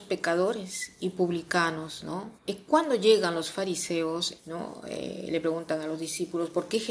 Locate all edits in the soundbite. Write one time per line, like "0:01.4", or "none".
0:02.4
0:04.4